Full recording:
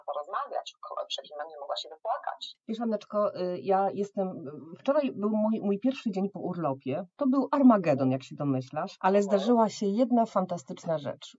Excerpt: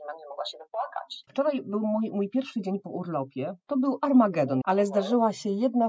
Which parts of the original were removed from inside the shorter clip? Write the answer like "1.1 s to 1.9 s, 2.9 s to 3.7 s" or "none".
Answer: 2.6 s to 4.8 s, 8.1 s to 9.0 s